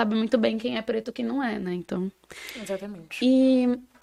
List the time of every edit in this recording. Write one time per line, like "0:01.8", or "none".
none